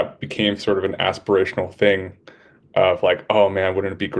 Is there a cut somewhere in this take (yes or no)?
no